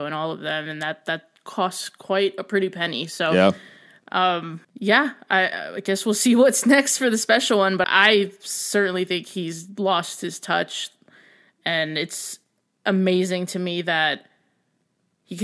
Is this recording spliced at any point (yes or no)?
yes